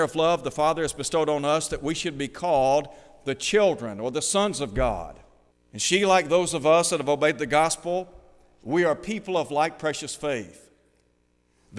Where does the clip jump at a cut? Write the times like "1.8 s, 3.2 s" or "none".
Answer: 5.5 s